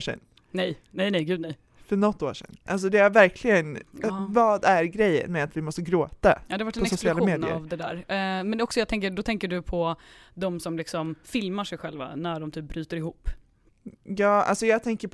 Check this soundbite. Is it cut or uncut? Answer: uncut